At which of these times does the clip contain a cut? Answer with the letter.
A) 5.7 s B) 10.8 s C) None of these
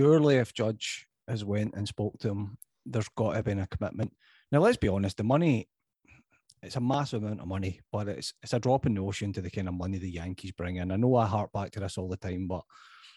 C